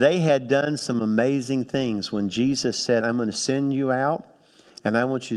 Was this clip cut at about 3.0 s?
yes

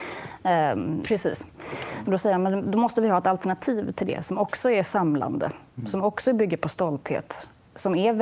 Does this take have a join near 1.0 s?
yes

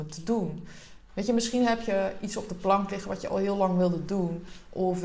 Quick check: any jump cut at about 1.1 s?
yes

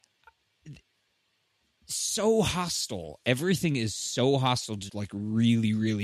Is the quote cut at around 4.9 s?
yes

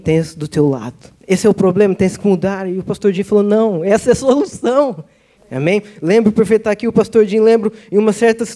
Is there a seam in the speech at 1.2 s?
yes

